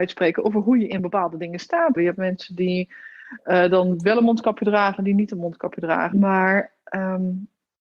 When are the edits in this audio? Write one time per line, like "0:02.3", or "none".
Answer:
0:02.0
0:06.1